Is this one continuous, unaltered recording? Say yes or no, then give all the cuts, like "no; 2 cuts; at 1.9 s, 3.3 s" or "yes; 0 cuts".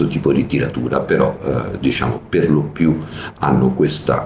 yes; 0 cuts